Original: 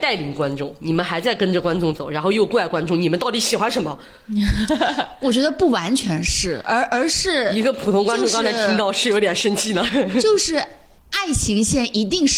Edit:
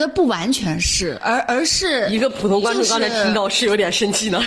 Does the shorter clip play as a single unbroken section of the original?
yes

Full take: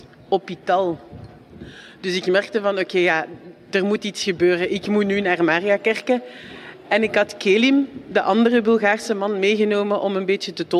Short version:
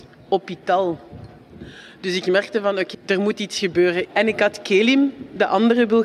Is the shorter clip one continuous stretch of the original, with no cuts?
no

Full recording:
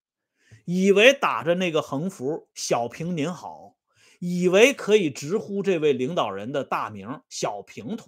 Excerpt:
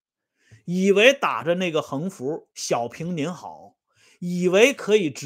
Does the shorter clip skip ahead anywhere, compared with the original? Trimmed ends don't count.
no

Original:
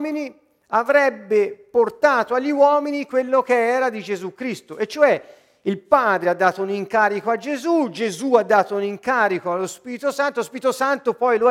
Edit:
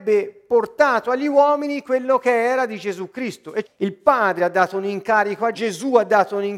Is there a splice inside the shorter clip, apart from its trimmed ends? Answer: yes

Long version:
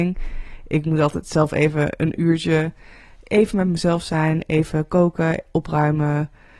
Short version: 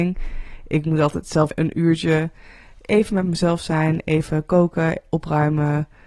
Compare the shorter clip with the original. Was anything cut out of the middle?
yes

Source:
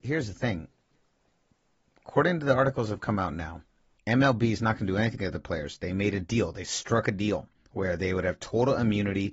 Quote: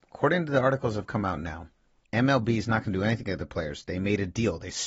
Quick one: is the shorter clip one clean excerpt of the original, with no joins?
yes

